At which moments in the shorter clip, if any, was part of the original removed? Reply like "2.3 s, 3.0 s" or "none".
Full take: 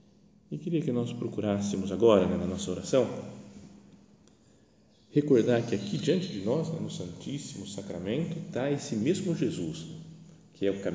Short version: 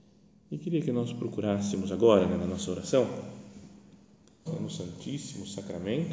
4.5 s